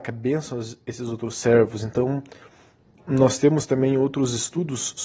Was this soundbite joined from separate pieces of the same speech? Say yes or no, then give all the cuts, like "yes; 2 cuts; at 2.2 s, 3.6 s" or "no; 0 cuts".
no; 0 cuts